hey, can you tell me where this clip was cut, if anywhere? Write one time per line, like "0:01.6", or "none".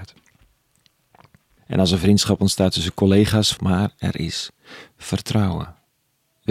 0:01.6
0:03.6